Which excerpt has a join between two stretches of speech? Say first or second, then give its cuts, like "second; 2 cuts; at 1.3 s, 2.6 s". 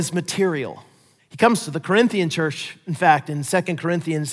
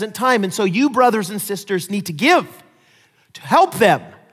first; 1 cut; at 1.2 s